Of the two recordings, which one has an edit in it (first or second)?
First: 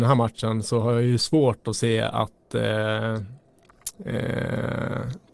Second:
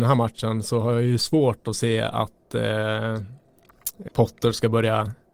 second